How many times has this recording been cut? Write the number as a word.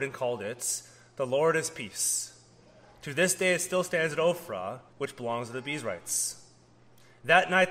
one